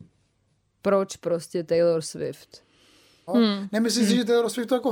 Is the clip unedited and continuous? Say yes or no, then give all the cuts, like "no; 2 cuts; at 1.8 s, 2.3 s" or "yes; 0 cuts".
no; 1 cut; at 3.3 s